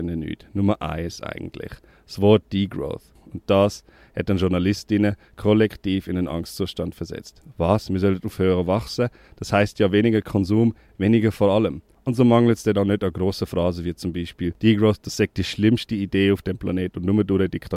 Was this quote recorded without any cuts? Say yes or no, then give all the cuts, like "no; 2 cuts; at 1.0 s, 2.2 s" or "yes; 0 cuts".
no; 1 cut; at 10.9 s